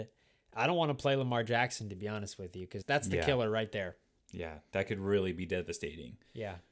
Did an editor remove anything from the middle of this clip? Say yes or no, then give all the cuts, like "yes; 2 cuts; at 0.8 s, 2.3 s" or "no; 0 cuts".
yes; 1 cut; at 2.8 s